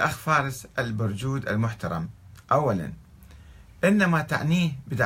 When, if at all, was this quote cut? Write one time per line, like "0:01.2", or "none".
none